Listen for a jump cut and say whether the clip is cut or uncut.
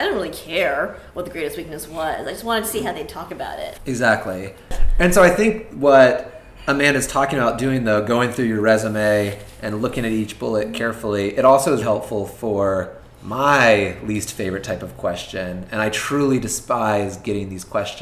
cut